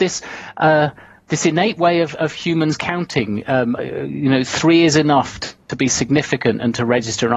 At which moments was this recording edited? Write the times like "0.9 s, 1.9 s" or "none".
3.8 s